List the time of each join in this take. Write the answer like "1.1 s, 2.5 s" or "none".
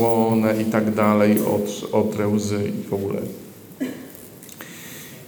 none